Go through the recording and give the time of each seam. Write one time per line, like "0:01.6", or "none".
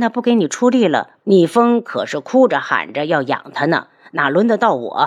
0:01.2